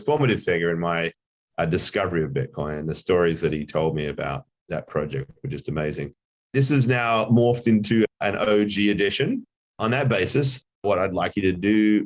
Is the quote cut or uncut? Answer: cut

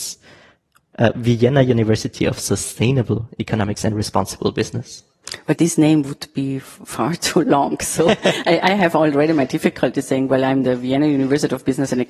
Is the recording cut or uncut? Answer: uncut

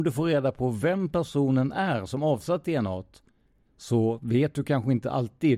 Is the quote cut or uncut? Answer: uncut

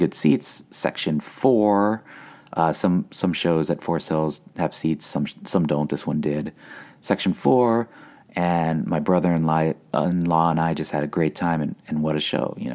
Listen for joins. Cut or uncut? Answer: uncut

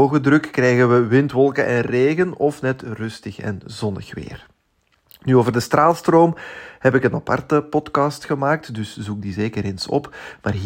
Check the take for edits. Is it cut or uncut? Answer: uncut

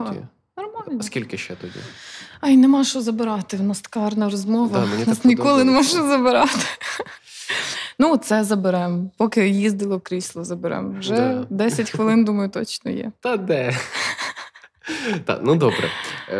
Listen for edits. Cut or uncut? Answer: uncut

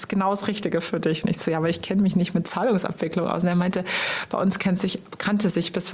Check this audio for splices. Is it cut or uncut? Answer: uncut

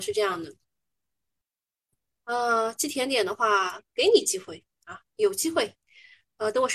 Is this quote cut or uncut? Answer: uncut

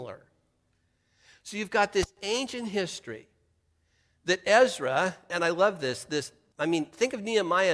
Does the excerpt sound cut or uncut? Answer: cut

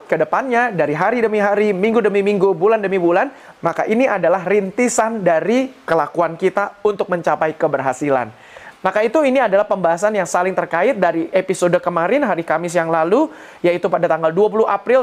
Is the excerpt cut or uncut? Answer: cut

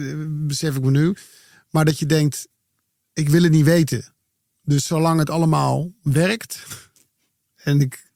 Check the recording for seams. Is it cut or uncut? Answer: uncut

